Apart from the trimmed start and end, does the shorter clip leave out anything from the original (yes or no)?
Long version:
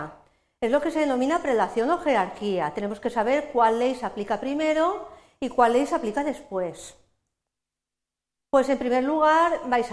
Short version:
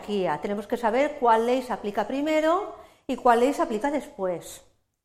no